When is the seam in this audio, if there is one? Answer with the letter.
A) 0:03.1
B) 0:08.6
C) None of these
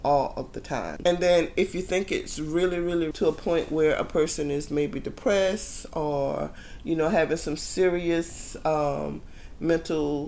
A